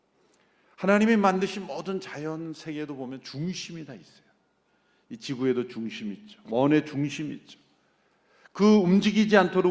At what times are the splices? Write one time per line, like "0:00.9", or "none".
none